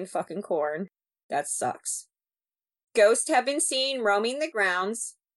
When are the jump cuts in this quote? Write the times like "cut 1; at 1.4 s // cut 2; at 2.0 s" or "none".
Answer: cut 1; at 2.9 s